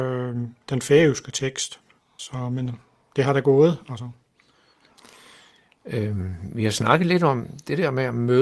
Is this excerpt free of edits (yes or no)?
no